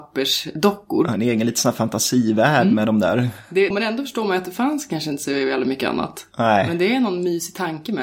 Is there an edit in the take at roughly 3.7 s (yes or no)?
yes